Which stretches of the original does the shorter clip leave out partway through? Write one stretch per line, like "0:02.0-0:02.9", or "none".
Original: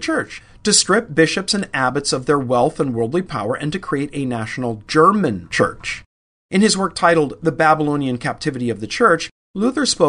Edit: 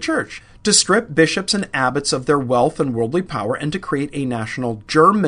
none